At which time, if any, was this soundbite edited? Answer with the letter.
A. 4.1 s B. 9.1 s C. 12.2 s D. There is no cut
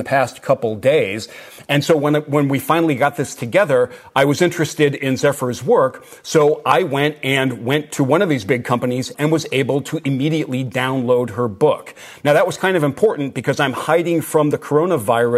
B